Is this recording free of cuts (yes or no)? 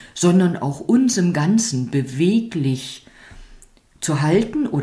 yes